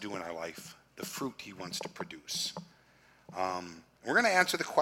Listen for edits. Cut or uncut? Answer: uncut